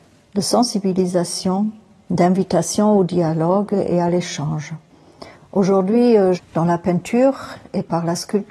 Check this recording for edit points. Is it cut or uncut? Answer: cut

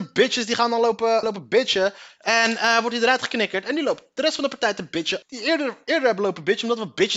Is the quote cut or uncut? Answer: cut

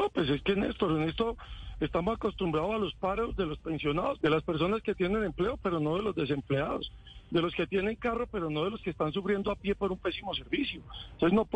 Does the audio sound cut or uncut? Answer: cut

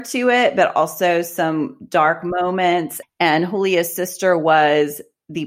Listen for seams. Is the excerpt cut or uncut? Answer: cut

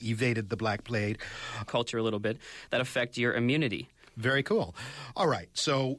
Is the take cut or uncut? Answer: cut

